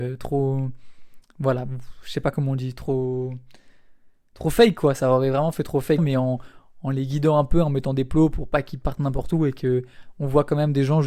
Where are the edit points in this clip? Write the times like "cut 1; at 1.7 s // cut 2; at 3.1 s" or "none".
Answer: cut 1; at 6.0 s

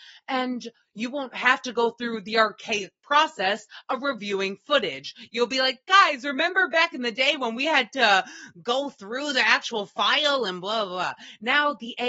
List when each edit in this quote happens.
none

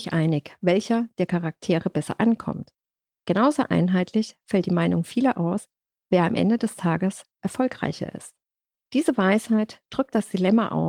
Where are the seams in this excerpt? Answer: cut 1; at 8.8 s

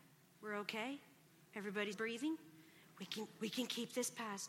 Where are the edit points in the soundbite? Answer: cut 1; at 1.9 s

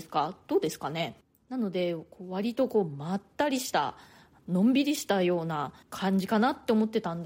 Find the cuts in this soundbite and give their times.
cut 1; at 4.4 s // cut 2; at 5.8 s

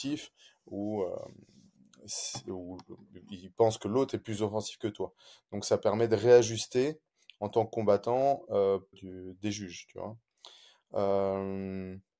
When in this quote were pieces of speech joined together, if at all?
cut 1; at 8.9 s

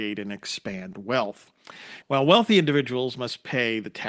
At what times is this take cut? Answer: cut 1; at 2.0 s

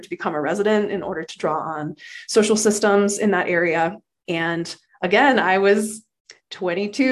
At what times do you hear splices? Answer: cut 1; at 4.2 s

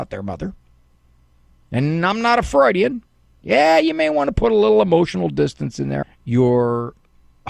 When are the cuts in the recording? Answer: cut 1; at 3.4 s // cut 2; at 6.0 s

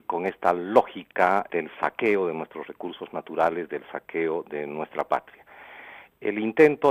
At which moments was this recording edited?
cut 1; at 1.5 s

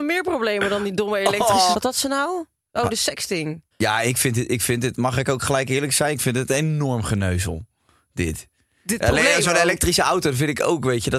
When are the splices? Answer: cut 1; at 1.7 s // cut 2; at 3.7 s

